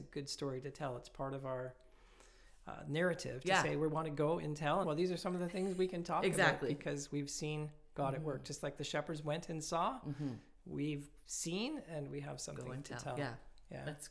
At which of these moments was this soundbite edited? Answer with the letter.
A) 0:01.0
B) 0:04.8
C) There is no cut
B